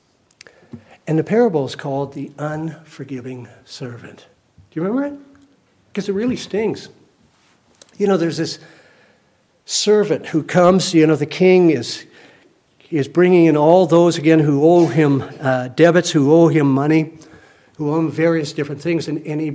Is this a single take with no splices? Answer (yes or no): yes